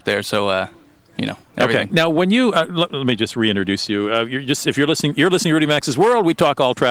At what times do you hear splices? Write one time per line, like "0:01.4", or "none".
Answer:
0:01.9